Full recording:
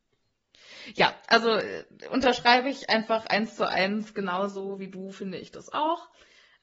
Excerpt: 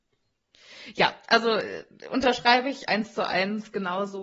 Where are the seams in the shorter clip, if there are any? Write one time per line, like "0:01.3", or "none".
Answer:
0:02.9